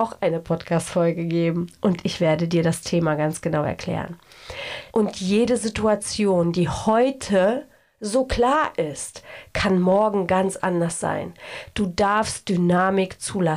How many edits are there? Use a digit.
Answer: 1